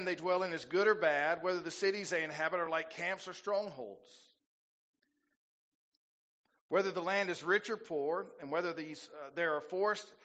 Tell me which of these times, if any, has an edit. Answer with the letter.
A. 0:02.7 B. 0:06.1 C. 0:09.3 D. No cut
D